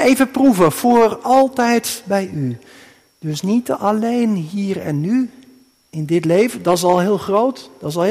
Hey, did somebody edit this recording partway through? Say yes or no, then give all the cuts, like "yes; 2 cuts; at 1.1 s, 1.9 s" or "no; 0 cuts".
no; 0 cuts